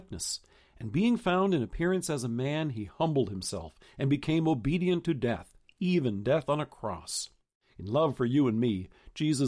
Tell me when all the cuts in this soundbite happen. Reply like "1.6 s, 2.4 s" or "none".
none